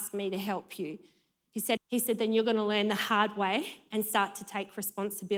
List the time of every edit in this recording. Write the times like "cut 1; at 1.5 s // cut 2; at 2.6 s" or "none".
cut 1; at 1.8 s